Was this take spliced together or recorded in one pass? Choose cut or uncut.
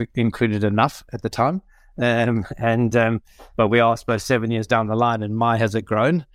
uncut